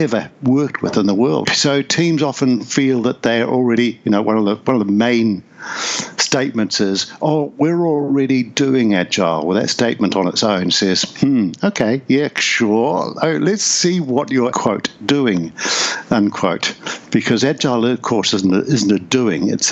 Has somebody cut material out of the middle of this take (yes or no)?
yes